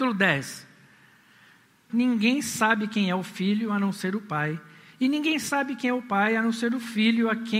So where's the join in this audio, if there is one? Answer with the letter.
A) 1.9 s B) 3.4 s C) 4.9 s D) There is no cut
A